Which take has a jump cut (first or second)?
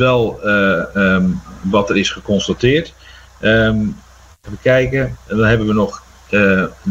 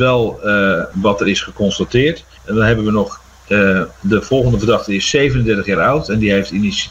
second